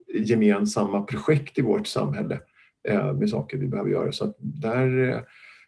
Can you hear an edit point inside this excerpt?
no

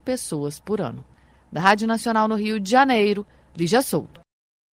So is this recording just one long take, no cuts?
yes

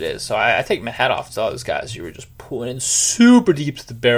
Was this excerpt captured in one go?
yes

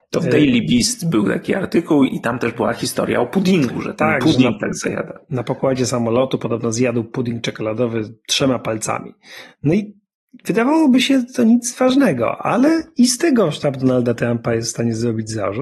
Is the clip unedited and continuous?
yes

